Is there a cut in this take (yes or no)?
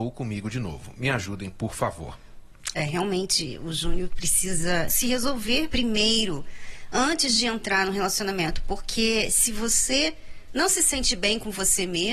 no